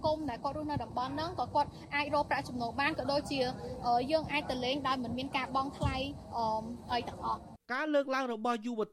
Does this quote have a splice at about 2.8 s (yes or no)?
no